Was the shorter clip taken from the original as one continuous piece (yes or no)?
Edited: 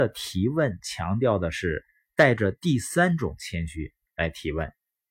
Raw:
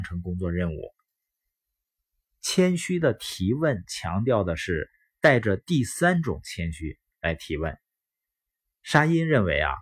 yes